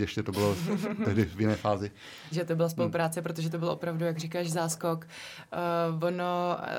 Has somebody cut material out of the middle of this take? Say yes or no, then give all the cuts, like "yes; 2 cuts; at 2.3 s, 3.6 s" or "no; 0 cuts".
yes; 1 cut; at 2.3 s